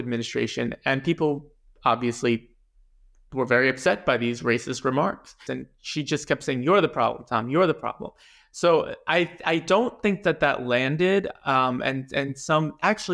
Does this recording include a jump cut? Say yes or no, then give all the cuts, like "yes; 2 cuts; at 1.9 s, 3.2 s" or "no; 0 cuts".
yes; 1 cut; at 5.5 s